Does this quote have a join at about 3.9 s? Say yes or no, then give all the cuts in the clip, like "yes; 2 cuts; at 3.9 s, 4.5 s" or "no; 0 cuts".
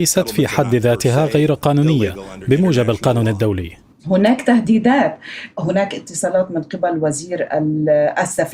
yes; 1 cut; at 3.9 s